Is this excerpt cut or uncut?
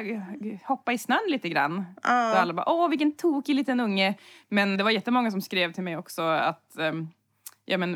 cut